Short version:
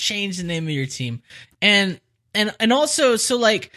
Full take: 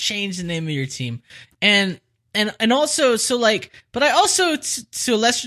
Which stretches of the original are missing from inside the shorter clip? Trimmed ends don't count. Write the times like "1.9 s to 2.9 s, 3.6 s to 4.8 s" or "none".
none